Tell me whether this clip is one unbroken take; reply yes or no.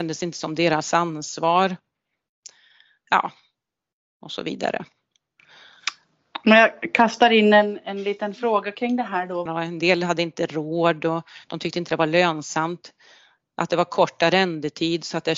no